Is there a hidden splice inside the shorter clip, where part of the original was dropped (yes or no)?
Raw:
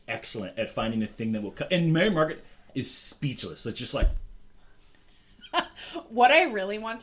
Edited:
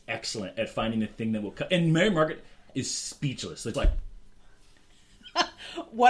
yes